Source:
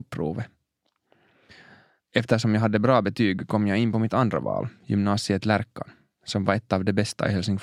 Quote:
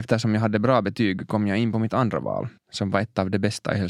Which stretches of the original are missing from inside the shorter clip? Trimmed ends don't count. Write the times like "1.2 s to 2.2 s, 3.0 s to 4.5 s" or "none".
4.8 s to 6.1 s